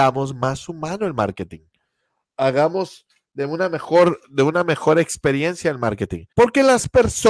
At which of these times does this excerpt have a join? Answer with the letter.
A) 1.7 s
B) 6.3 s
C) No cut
B